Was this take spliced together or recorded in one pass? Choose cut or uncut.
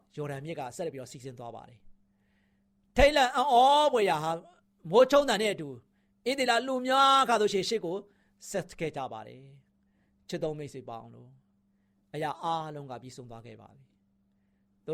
uncut